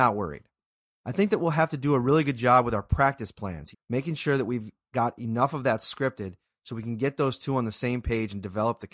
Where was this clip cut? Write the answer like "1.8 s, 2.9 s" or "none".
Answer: 3.7 s